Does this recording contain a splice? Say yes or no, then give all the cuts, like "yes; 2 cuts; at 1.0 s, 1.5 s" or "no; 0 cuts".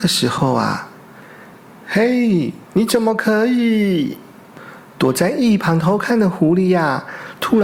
yes; 1 cut; at 2.6 s